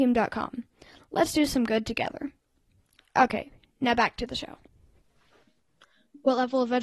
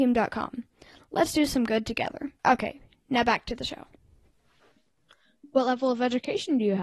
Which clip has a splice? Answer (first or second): second